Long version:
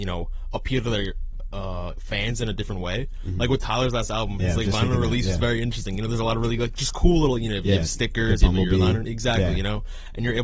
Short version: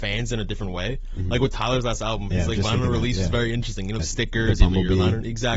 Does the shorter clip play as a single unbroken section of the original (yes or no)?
no